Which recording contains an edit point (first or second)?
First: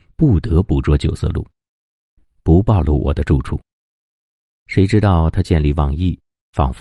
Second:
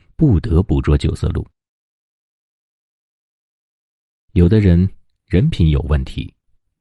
first